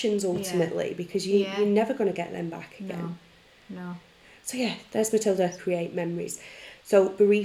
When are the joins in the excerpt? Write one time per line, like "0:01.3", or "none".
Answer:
0:05.6